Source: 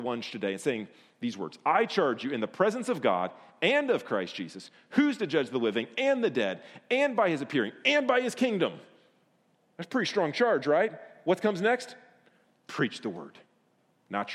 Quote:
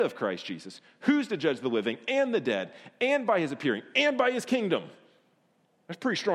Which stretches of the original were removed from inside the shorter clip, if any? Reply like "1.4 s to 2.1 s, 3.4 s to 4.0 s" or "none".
none